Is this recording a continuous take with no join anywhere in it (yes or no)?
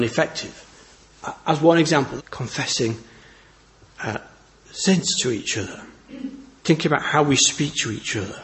no